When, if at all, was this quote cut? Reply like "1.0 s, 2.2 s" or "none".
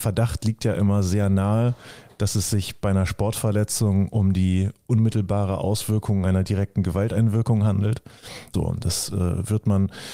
8.5 s